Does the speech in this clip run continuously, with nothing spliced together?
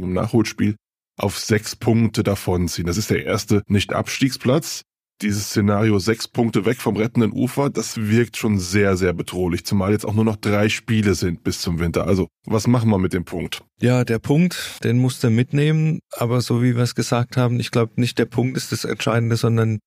no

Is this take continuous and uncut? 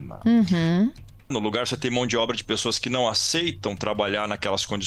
no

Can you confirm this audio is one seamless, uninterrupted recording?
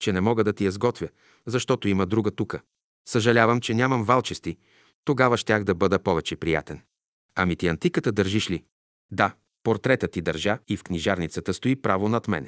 no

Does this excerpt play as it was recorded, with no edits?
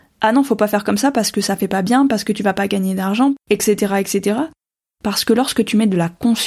no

